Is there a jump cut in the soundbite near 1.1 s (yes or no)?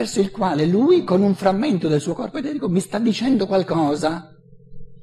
no